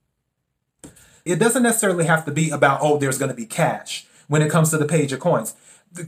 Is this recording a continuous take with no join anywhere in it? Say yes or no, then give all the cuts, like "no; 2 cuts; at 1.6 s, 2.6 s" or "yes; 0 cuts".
no; 1 cut; at 1.3 s